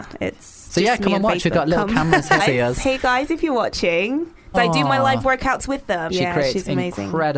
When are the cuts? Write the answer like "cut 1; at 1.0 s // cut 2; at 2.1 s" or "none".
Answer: cut 1; at 2.4 s // cut 2; at 4.5 s // cut 3; at 6.1 s